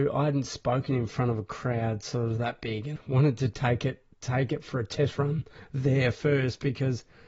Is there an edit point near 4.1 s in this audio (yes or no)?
yes